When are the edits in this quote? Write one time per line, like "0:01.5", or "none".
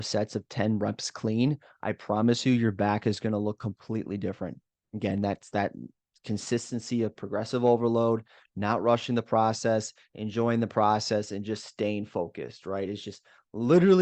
none

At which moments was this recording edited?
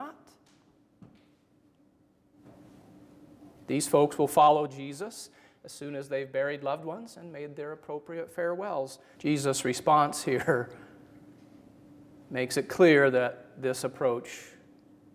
0:09.1
0:11.4

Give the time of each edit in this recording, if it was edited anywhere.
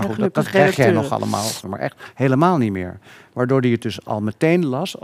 0:01.6

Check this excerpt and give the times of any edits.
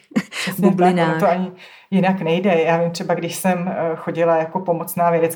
none

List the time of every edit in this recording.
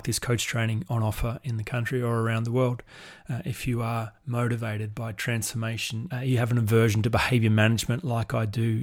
0:06.1

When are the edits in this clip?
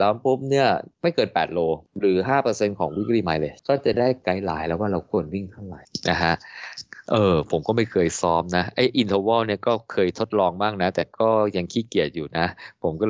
none

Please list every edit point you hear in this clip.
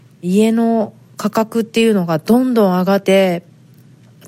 0:03.0

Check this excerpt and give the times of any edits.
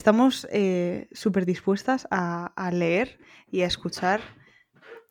none

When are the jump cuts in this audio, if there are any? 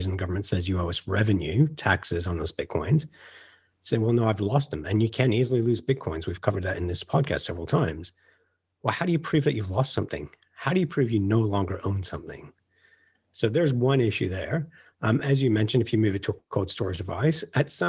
none

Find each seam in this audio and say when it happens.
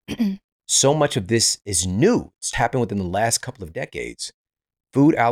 0:02.5

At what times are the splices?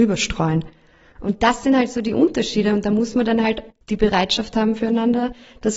none

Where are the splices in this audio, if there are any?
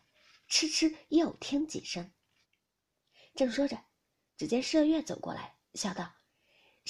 0:02.4

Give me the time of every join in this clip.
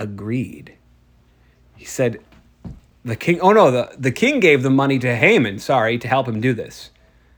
0:04.1

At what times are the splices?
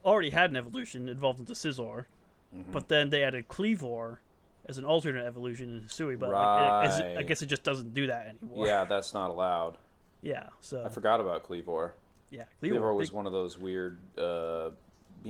none

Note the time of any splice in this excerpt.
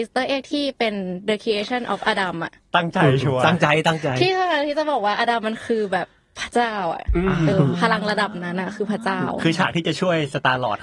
0:07.5

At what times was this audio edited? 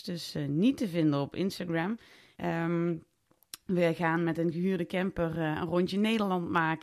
0:02.3

